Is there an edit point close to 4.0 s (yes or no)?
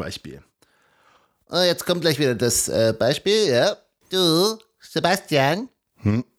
yes